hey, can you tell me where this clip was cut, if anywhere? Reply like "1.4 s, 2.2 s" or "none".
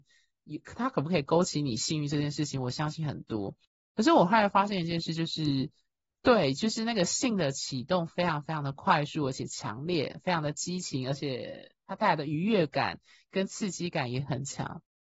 none